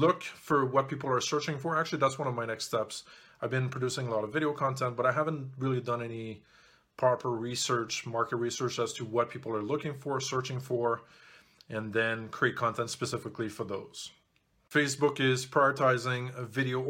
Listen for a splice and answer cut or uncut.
uncut